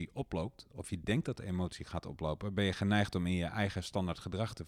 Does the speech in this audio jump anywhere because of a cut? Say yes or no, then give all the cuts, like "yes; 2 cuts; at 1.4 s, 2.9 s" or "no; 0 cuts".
no; 0 cuts